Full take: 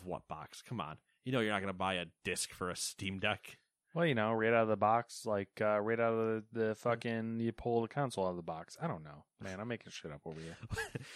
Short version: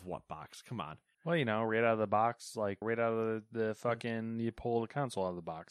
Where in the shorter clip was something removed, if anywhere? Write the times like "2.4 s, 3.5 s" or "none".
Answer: 1.1 s, 2.8 s